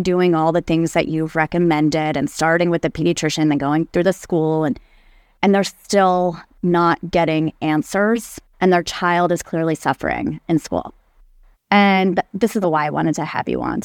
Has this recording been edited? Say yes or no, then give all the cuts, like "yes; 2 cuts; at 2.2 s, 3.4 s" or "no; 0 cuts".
yes; 2 cuts; at 11.5 s, 12.6 s